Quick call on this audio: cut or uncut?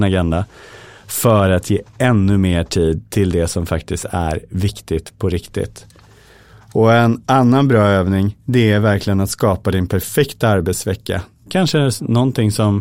cut